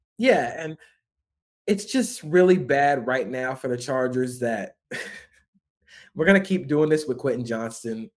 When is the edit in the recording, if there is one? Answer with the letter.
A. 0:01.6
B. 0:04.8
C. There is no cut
B